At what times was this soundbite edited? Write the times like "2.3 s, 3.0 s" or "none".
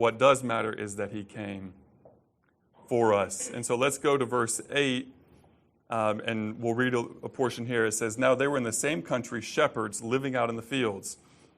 none